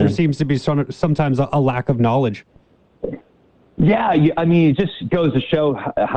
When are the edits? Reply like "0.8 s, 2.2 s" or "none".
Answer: none